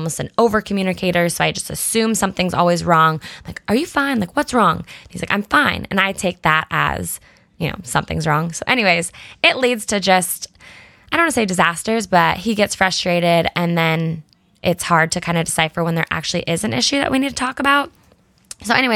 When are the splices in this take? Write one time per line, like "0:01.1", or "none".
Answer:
none